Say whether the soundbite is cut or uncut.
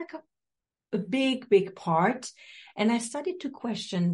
uncut